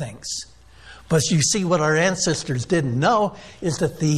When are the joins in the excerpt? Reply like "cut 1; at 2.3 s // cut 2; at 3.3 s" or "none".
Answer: none